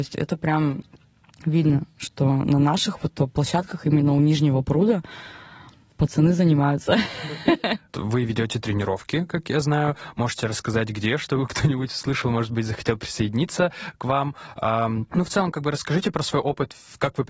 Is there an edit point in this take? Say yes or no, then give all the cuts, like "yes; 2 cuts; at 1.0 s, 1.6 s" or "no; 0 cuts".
no; 0 cuts